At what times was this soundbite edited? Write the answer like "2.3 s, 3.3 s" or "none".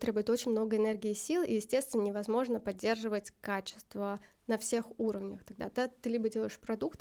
none